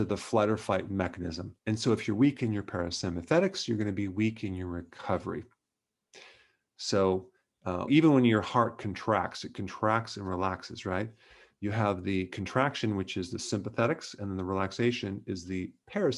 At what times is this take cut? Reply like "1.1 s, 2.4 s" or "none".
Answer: 1.6 s, 7.9 s